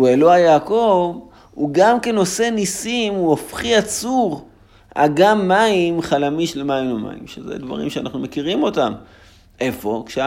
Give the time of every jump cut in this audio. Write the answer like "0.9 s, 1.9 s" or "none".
none